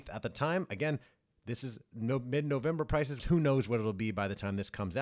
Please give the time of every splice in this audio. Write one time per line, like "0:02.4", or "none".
0:03.2